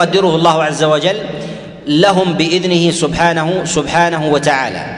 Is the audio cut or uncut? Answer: uncut